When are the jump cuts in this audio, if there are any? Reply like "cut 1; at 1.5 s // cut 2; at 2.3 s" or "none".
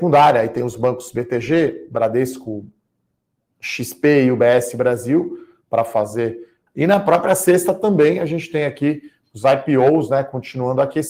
cut 1; at 6.7 s